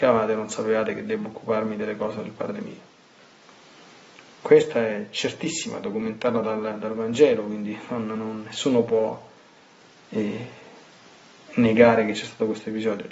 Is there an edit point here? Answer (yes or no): no